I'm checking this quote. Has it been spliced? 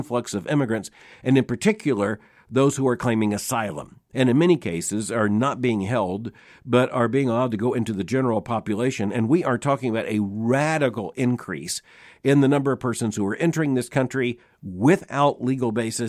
no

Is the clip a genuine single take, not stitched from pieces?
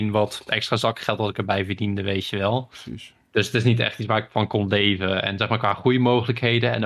yes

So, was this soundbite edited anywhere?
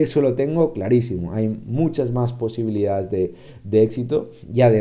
no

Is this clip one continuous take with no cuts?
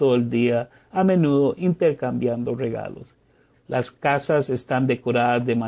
no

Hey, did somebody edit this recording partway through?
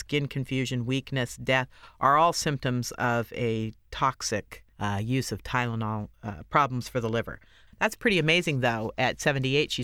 yes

